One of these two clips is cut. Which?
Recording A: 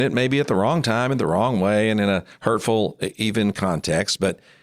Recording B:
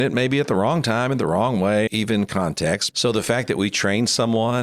B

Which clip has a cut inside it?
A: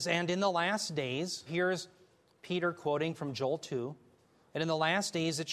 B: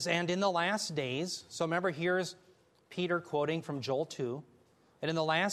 A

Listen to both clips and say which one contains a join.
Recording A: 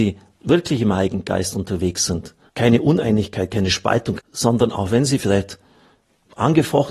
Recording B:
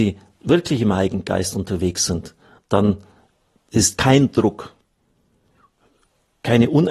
A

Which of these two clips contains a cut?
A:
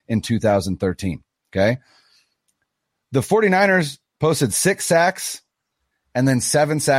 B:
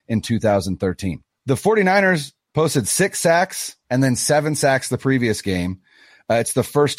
B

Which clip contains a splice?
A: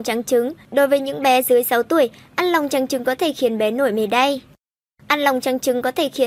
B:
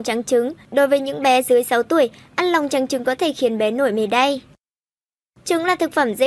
A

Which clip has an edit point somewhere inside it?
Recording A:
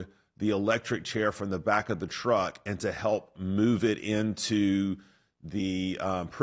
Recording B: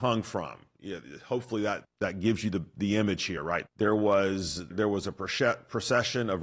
B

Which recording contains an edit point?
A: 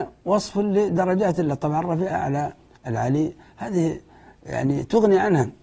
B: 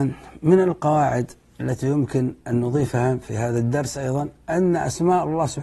A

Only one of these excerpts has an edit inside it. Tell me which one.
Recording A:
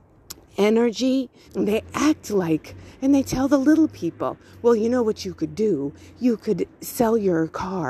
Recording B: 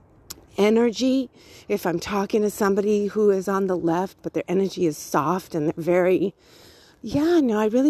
A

